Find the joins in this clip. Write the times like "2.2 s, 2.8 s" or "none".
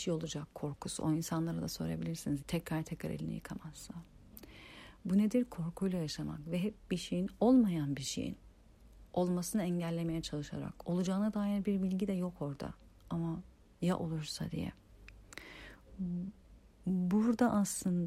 2.4 s

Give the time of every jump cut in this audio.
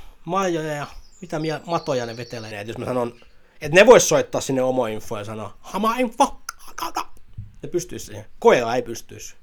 2.5 s

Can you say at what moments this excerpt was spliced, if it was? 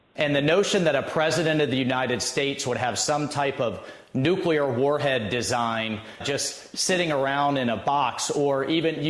6.2 s

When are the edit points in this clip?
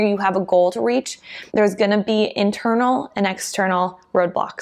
1.5 s

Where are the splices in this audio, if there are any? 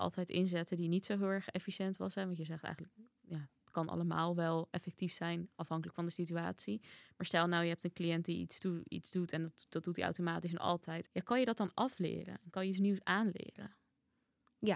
11.1 s

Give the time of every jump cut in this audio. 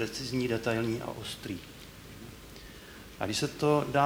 3.2 s

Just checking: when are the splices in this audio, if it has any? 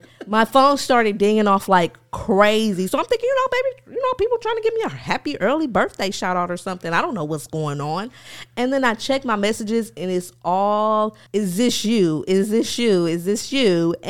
11.3 s

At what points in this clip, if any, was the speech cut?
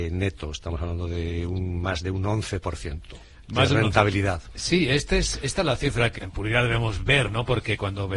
6.2 s

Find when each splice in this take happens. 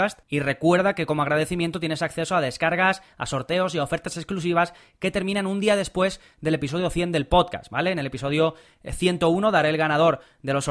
none

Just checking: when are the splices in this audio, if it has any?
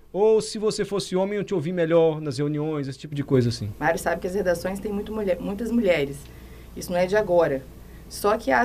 3.7 s

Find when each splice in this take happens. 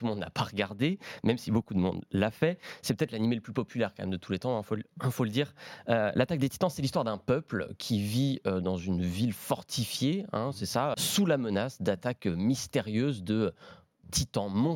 10.9 s

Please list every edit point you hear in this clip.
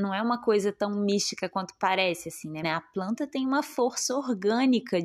2.6 s

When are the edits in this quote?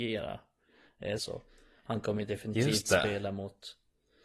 1.2 s

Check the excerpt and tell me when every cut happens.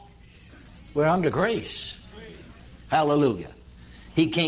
2.9 s

